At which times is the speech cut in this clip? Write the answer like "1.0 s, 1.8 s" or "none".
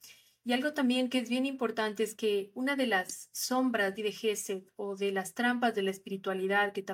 4.0 s